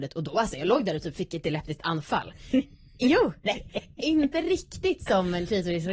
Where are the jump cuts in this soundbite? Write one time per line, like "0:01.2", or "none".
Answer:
0:03.7